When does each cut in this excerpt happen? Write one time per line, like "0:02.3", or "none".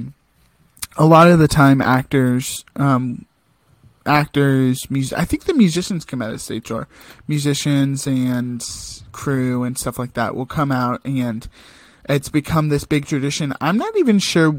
none